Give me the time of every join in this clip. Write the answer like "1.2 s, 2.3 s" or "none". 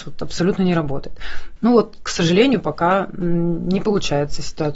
1.6 s